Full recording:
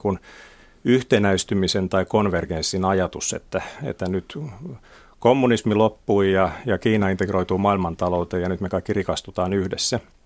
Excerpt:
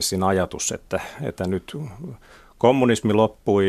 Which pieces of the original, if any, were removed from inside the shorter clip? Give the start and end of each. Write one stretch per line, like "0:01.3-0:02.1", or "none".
none